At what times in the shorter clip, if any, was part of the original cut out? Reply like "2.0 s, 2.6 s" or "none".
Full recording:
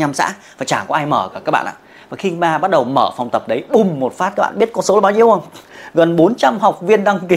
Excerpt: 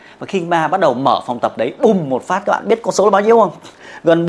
none